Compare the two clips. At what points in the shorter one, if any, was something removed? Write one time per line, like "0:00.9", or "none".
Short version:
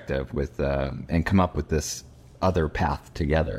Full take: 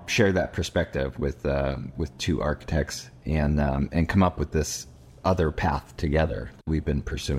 0:01.1